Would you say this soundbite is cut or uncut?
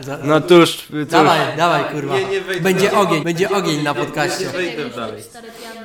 cut